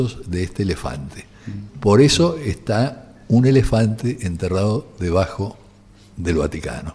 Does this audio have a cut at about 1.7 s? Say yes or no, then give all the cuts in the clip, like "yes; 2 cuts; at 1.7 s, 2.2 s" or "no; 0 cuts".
yes; 1 cut; at 1.7 s